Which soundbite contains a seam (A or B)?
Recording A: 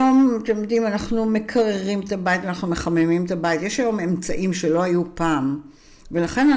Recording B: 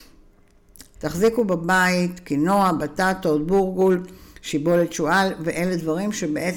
B